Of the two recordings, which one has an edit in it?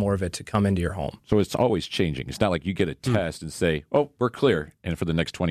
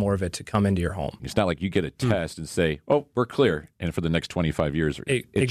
second; 1 cut; at 1.2 s

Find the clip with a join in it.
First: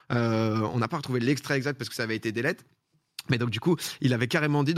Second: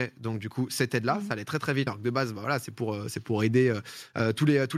second; 1 cut; at 1.9 s

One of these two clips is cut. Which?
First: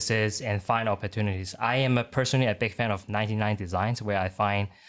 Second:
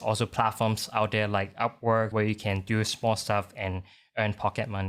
second; 1 cut; at 2.1 s

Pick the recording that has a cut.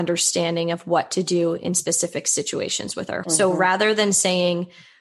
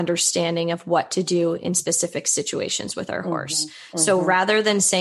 first; 1 cut; at 3.2 s

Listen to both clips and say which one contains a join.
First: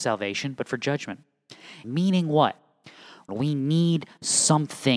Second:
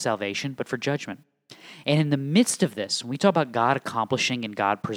first; 2 cuts; at 1.8 s, 3.3 s

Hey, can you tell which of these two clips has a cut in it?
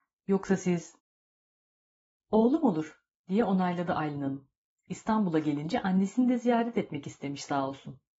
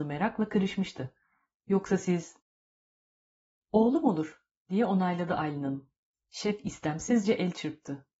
second; 1 cut; at 6.1 s

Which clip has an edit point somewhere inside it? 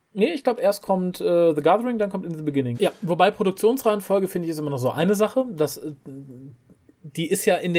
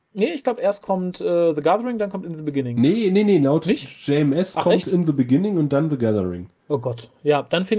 first; 1 cut; at 2.7 s

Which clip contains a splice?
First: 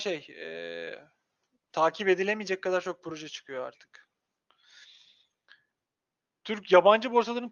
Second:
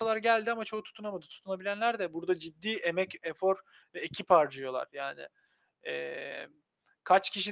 first; 1 cut; at 1.7 s

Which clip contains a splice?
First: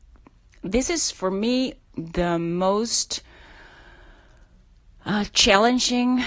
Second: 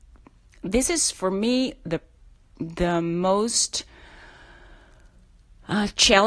first; 1 cut; at 1.8 s

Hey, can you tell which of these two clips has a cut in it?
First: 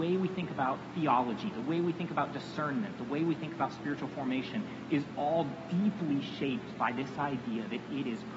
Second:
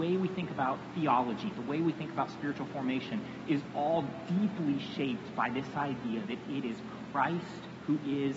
second; 1 cut; at 1.5 s

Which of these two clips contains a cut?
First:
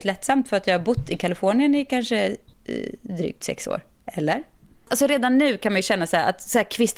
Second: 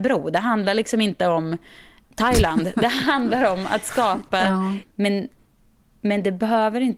second; 1 cut; at 4.8 s

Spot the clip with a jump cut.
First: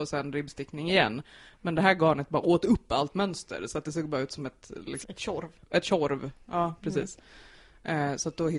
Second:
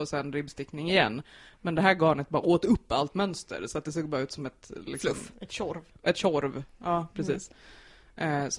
first; 1 cut; at 5.0 s

